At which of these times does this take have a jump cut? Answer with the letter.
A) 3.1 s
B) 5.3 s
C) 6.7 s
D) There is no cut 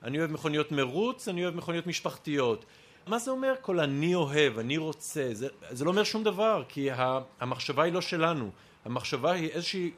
A